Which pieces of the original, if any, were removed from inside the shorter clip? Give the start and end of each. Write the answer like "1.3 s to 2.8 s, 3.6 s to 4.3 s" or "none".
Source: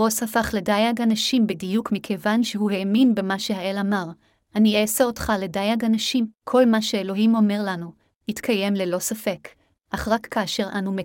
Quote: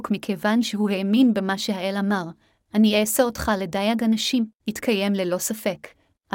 6.4 s to 8.2 s